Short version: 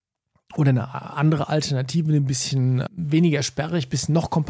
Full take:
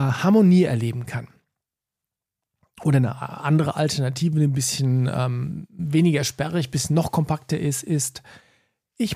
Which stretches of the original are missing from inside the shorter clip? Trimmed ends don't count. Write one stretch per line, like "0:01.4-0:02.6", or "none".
0:05.1-0:05.7

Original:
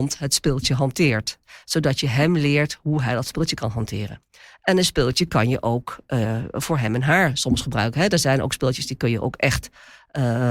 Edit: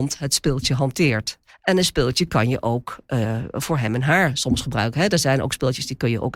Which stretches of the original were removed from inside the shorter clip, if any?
0:01.5-0:04.5

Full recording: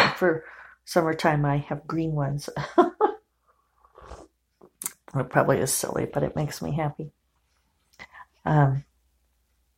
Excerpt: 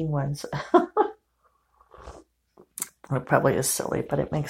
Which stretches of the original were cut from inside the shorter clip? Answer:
none

